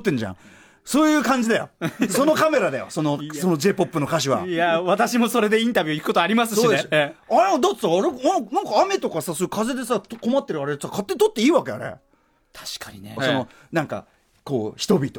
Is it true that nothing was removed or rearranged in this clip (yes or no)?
no